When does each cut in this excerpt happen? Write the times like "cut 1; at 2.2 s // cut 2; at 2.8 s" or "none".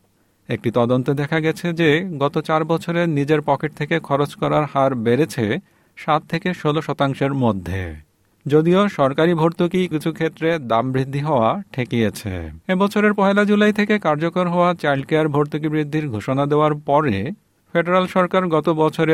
cut 1; at 9.9 s // cut 2; at 12.6 s